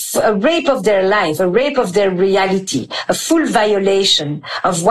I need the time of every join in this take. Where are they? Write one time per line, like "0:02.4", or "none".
none